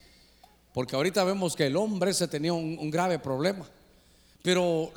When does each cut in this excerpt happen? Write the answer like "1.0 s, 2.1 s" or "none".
none